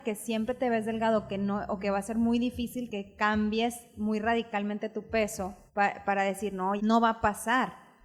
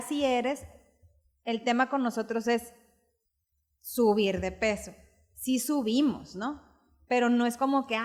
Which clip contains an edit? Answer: first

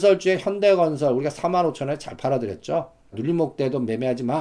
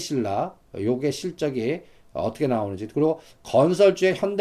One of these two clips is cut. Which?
first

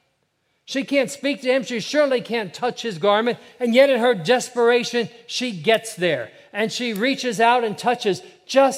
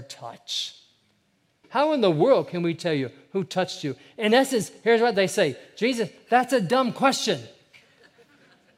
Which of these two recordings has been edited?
second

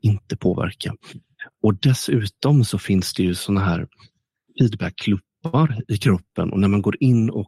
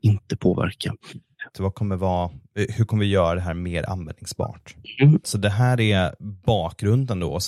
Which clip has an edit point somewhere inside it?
second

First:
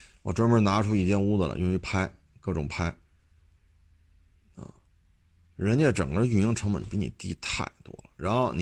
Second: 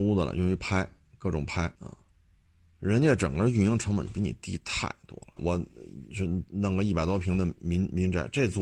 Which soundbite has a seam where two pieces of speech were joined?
second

